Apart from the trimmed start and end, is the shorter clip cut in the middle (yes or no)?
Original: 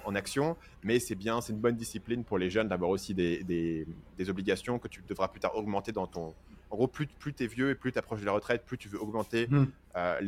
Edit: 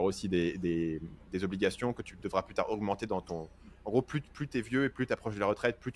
no